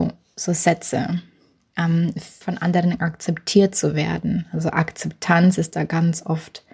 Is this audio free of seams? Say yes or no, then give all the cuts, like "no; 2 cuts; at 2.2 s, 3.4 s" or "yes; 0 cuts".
no; 1 cut; at 2.4 s